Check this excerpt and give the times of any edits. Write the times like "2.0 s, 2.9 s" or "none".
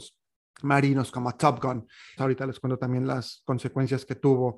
2.2 s